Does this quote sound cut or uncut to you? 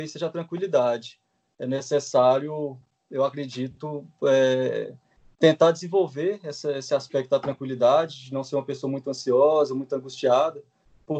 uncut